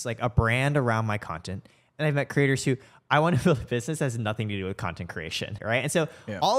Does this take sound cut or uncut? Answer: cut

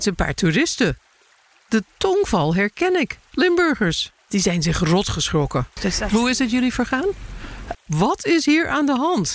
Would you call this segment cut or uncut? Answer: cut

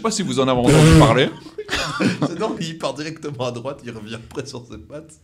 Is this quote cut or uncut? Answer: cut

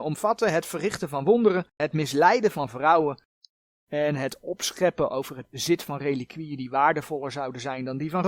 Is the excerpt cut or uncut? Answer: cut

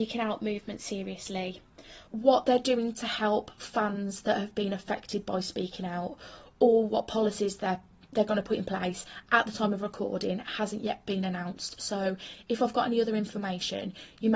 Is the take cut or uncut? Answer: cut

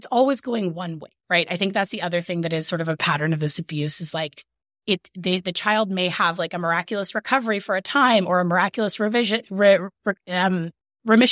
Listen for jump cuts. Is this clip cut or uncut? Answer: uncut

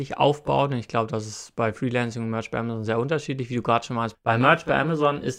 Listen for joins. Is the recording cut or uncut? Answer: cut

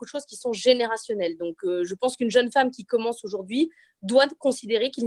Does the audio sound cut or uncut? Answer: uncut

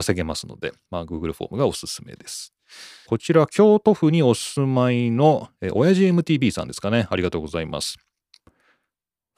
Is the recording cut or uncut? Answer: cut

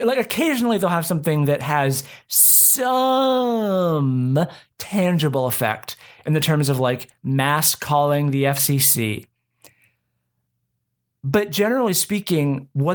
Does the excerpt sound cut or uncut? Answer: uncut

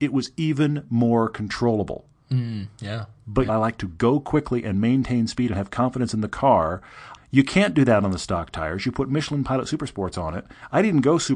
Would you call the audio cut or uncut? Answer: cut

